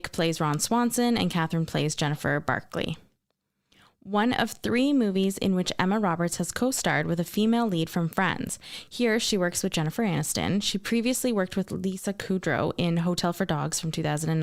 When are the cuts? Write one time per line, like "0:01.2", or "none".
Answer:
none